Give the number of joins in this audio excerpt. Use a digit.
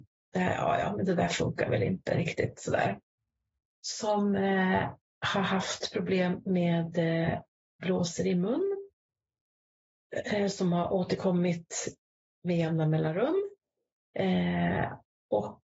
0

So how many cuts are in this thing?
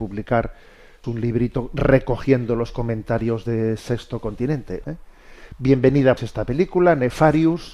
3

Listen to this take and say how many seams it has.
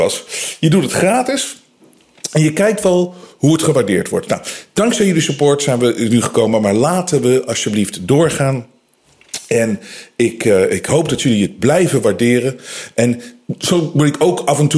0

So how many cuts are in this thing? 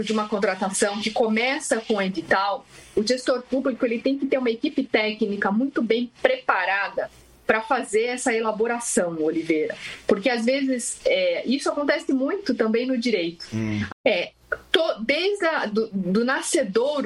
1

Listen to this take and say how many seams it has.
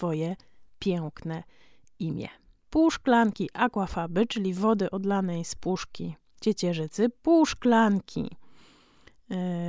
1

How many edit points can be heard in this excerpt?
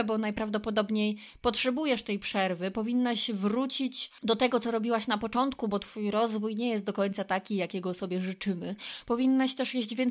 1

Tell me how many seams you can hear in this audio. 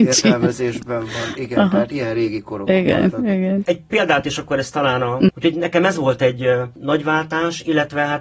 1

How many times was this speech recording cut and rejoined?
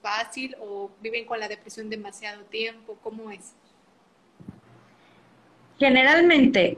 0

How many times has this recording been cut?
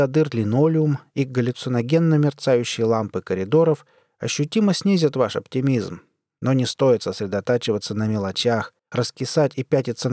1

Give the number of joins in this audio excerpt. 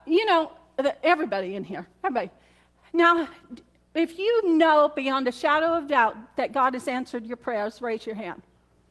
0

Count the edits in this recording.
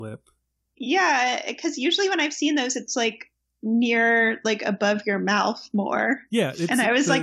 0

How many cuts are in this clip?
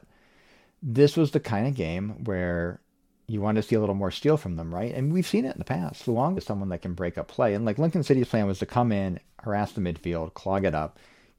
1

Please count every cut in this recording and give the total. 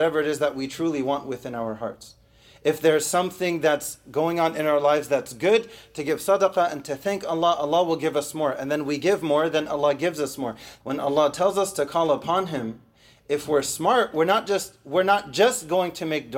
1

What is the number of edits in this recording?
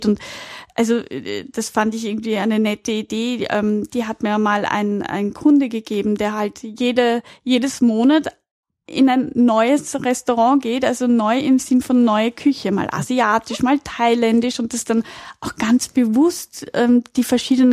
0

